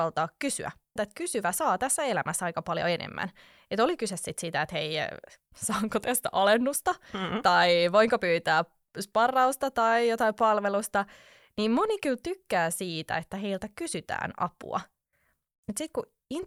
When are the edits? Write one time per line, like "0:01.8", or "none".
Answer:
0:01.0